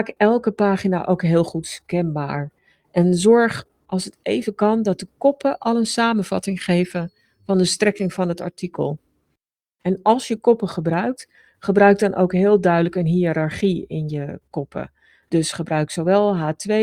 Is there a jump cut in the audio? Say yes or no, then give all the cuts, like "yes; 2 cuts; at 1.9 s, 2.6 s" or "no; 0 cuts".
no; 0 cuts